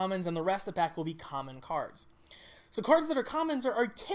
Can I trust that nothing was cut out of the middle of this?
yes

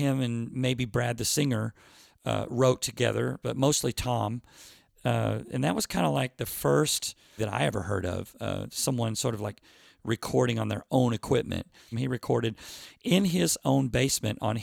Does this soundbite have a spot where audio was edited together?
yes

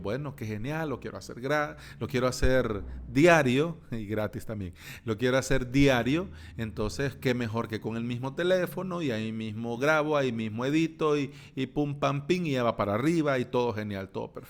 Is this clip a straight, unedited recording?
yes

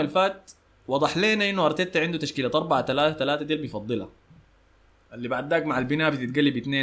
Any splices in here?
no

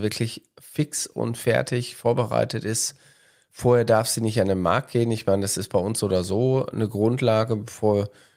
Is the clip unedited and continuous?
yes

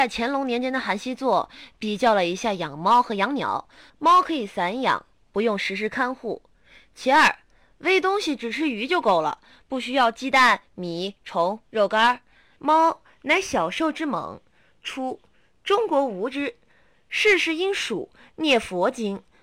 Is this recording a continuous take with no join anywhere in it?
no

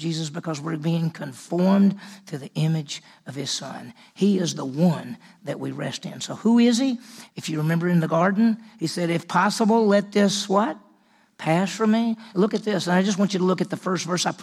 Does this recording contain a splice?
yes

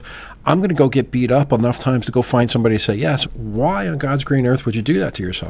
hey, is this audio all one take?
no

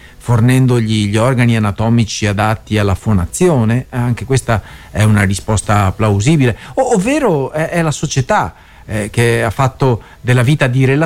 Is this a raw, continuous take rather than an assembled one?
yes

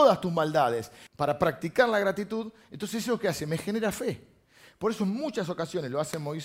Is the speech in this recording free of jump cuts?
no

